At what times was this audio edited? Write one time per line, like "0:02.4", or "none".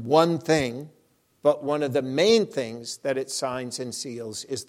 0:01.3